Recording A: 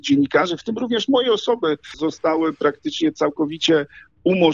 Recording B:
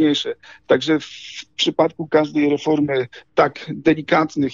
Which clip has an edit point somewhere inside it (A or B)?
A